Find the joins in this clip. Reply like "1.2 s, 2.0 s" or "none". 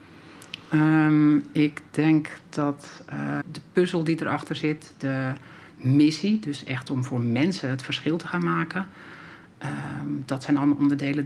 3.4 s